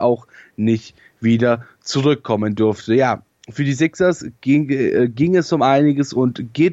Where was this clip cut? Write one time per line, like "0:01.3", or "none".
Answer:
none